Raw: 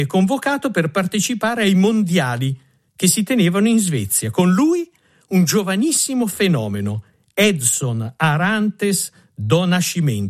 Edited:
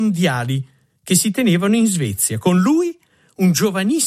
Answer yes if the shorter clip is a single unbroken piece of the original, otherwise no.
yes